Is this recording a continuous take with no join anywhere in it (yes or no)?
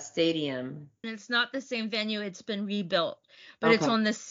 no